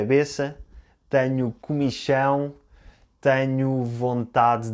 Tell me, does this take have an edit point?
no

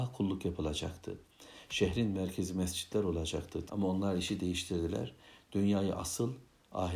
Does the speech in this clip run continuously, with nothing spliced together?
no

